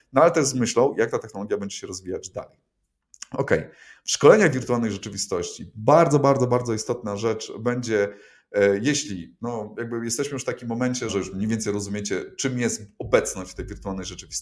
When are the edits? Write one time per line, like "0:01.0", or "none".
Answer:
0:11.1